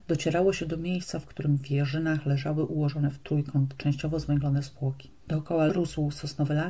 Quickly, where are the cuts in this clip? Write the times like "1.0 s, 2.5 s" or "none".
5.2 s